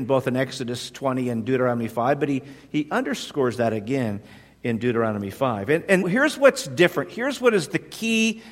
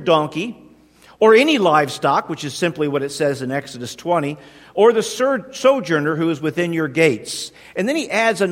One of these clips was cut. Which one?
first; 1 cut; at 6.0 s

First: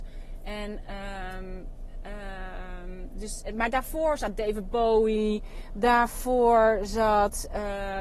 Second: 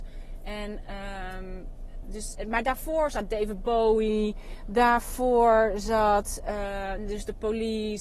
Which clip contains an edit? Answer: second; 1 cut; at 2.0 s

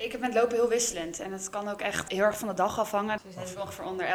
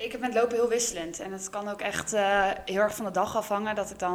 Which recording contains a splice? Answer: first; 2 cuts; at 2.1 s, 3.2 s

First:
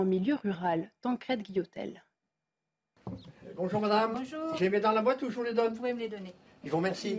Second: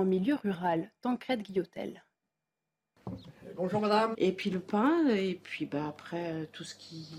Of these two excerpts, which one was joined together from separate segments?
second; 1 cut; at 4.1 s

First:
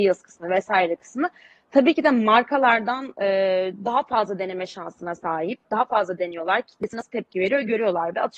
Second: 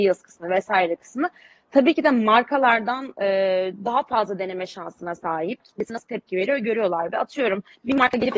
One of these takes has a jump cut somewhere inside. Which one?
second; 1 cut; at 5.6 s

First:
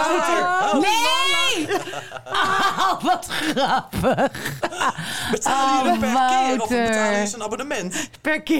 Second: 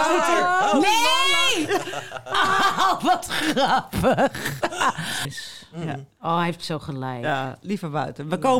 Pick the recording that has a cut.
second; 1 cut; at 5.2 s

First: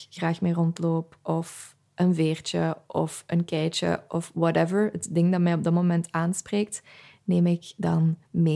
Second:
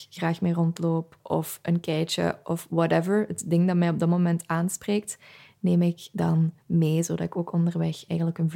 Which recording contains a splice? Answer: second; 1 cut; at 1.2 s

